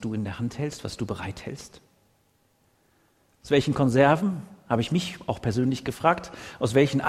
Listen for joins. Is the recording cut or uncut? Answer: uncut